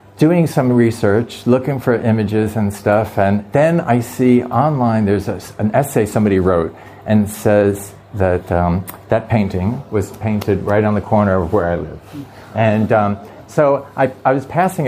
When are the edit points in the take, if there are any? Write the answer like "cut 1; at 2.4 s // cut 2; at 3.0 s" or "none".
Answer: none